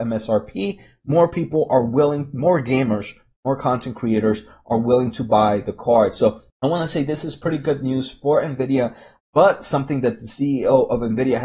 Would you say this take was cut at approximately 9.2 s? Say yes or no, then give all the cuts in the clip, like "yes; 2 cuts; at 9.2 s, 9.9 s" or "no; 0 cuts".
yes; 2 cuts; at 6.5 s, 9.2 s